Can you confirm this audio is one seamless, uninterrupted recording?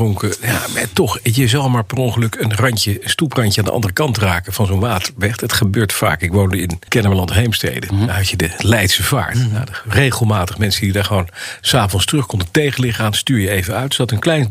yes; 0 cuts

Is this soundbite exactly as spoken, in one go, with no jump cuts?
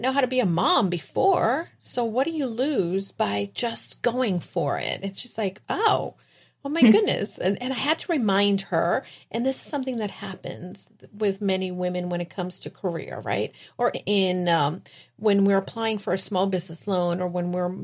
no; 1 cut; at 13.9 s

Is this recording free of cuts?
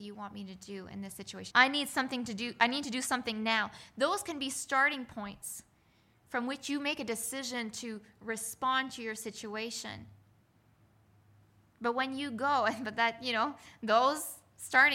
no; 1 cut; at 1.5 s

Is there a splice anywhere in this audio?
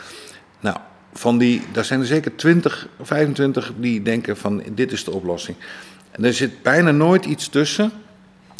no; 0 cuts

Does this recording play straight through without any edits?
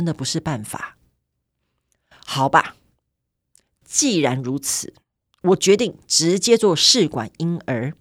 yes; 0 cuts

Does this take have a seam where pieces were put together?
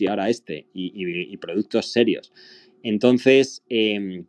no; 0 cuts

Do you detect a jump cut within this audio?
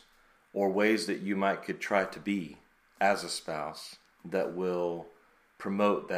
no; 0 cuts

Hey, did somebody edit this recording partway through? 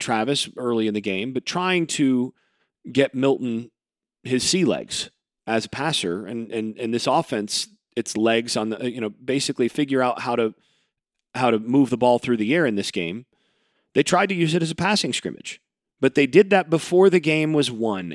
no; 0 cuts

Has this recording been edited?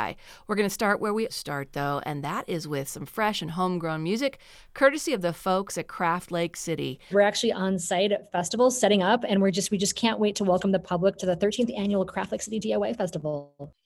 yes; 2 cuts; at 1.3 s, 7.1 s

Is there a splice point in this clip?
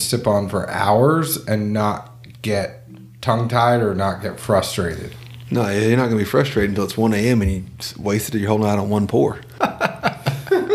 no; 0 cuts

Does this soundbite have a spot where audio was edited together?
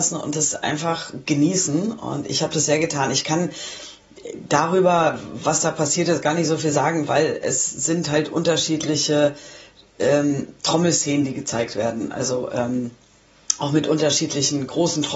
no; 0 cuts

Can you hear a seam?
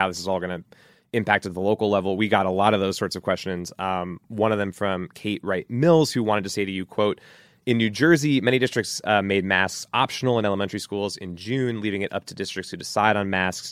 no; 0 cuts

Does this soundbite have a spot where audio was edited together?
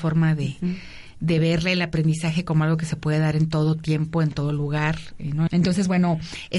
yes; 1 cut; at 5.5 s

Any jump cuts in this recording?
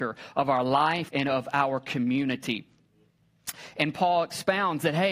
yes; 1 cut; at 1.1 s

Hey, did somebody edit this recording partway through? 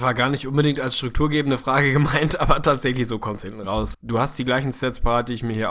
yes; 1 cut; at 3.9 s

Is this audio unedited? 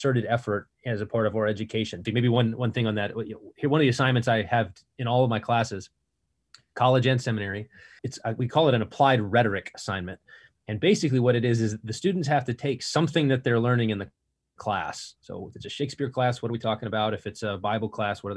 no; 2 cuts; at 2.0 s, 8.0 s

